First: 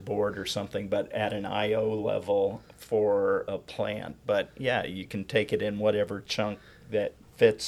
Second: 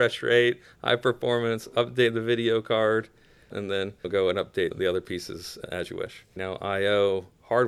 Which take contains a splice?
second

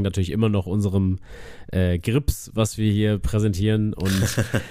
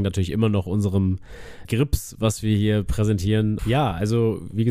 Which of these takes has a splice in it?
second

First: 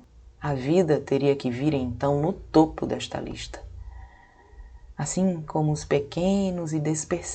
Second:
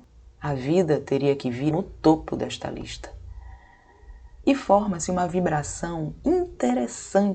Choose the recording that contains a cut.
second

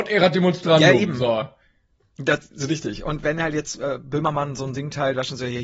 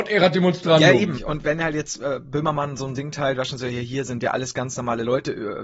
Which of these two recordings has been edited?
second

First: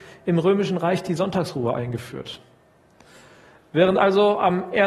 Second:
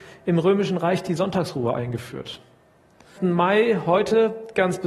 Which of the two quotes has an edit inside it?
second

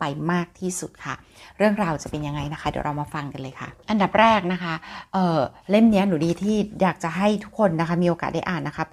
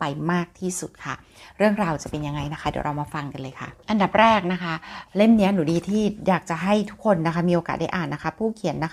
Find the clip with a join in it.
second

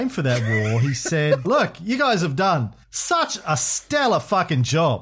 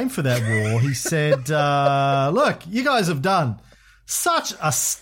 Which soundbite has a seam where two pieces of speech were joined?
first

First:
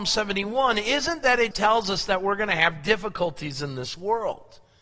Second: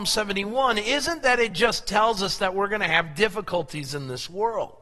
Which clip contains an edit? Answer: first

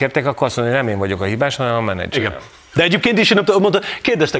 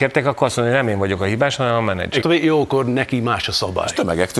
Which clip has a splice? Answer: second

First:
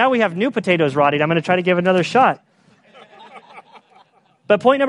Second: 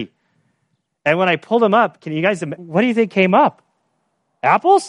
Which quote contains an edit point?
second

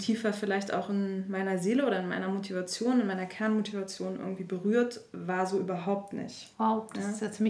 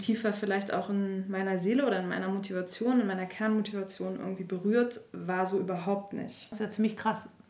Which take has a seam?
second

